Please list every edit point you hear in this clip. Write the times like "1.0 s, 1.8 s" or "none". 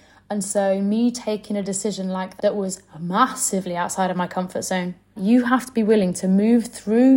2.4 s, 5.2 s